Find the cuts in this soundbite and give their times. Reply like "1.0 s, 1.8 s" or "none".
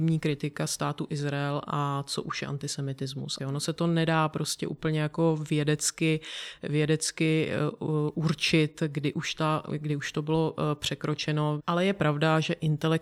3.4 s, 11.6 s

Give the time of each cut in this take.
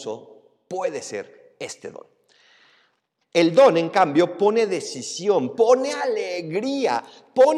3.2 s, 5.5 s

